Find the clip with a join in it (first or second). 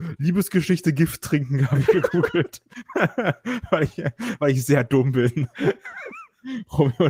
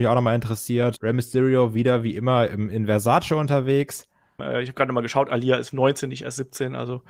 second